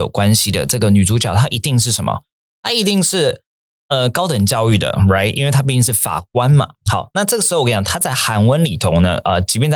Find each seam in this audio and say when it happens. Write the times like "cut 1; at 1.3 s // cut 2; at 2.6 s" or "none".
none